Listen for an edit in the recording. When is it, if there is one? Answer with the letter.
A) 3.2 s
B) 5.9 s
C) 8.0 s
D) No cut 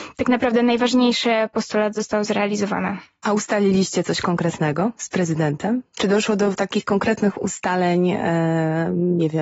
D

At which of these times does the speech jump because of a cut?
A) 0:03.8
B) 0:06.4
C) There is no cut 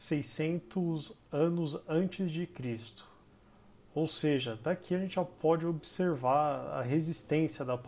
C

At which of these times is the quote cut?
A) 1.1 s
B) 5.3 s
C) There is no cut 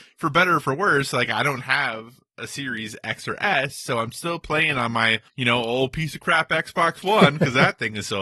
B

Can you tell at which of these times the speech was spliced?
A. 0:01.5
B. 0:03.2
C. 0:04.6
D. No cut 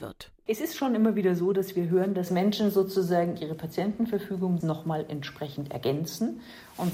C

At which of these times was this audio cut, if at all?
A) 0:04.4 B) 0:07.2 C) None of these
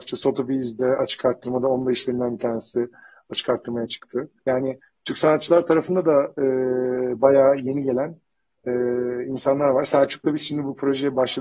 A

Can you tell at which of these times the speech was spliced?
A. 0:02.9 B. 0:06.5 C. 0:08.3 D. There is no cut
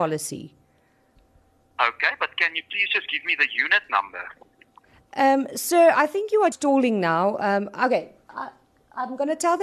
B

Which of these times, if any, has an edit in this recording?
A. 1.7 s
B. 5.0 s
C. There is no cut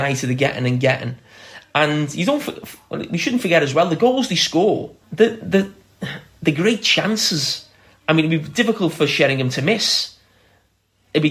B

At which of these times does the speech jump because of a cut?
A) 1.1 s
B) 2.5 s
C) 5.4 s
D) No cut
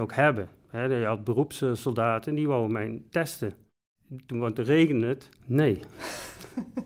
C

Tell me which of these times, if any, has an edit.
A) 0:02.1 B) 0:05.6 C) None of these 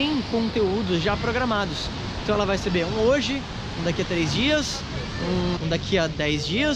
B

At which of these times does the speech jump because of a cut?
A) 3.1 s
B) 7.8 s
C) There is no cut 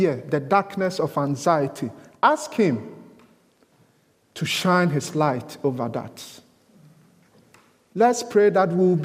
C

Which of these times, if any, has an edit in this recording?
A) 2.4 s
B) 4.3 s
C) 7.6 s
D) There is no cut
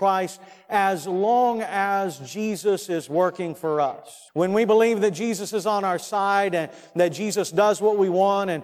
B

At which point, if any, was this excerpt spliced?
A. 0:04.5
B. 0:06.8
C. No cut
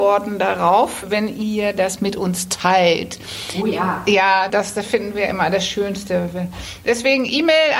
A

